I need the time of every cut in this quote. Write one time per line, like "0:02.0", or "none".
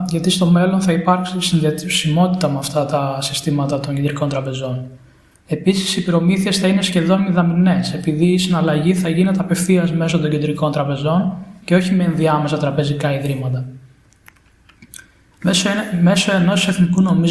0:05.4
0:15.3